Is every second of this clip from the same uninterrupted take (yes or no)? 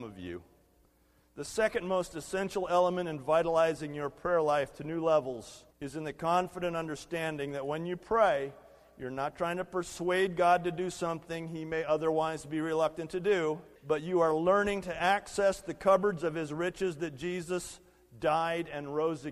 no